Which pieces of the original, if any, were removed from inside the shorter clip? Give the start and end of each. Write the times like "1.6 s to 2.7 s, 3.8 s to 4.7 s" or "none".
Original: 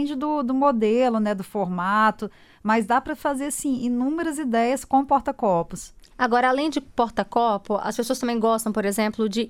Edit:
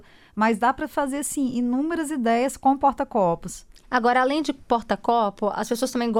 none